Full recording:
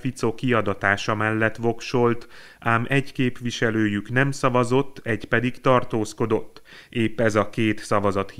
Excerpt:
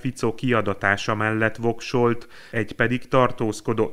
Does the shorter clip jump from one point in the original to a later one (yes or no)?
yes